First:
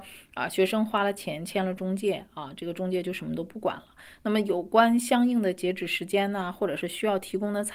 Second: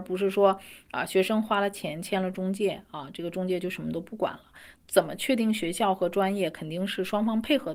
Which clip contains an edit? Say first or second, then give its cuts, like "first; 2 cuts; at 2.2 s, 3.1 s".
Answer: second; 1 cut; at 4.7 s